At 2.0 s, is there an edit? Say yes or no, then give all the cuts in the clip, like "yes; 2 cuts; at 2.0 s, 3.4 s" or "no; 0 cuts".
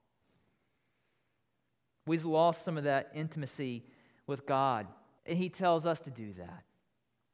yes; 2 cuts; at 2.0 s, 5.2 s